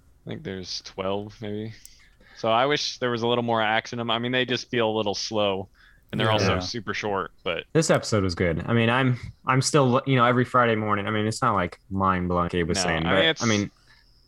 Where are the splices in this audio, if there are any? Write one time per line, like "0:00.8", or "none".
0:02.0
0:07.7
0:12.5